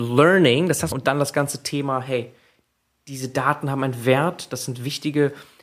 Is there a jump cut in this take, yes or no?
yes